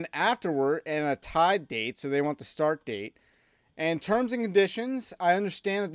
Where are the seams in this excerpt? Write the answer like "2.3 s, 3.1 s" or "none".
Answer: none